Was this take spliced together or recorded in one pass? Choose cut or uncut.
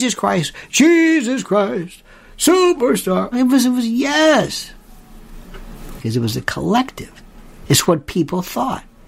cut